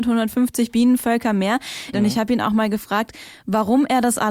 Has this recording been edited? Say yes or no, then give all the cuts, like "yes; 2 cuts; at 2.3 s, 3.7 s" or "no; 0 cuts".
yes; 1 cut; at 1.9 s